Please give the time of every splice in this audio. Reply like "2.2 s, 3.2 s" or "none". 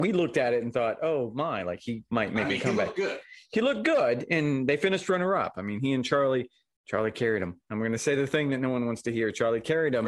7.7 s

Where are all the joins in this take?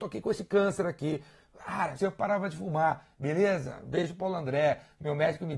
2.0 s

